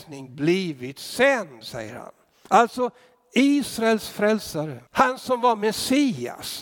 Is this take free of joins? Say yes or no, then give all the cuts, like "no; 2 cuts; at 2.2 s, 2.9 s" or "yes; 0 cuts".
no; 2 cuts; at 2.5 s, 4.9 s